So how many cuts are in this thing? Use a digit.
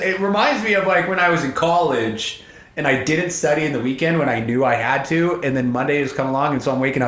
0